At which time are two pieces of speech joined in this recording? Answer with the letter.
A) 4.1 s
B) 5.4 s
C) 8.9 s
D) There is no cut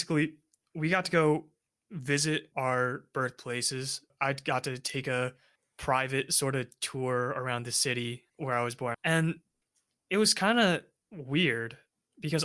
C